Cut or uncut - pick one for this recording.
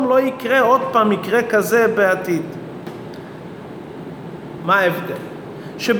cut